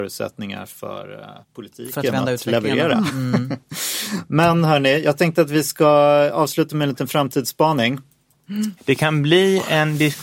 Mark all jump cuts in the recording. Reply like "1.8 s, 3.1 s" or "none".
1.4 s, 8.8 s